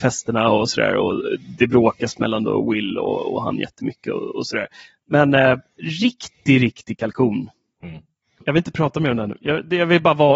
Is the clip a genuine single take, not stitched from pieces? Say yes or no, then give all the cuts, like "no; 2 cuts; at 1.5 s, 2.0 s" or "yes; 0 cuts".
yes; 0 cuts